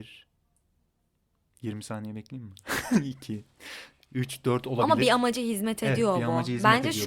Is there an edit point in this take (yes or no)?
no